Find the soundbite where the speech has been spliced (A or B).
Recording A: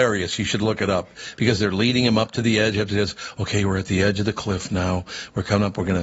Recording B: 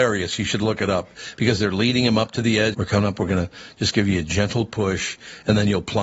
B